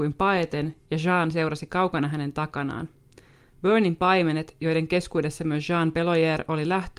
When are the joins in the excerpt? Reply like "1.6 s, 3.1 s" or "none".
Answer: none